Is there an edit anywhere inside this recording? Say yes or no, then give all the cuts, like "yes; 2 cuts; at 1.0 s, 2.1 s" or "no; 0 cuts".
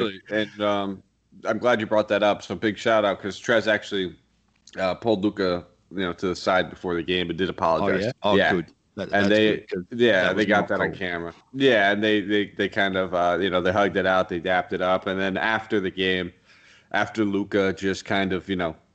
yes; 1 cut; at 8.1 s